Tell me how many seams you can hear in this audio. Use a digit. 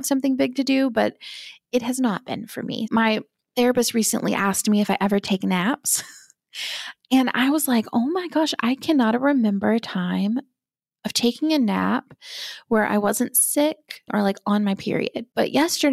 2